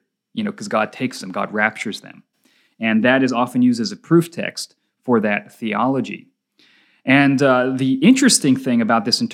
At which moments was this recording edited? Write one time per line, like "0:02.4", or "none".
none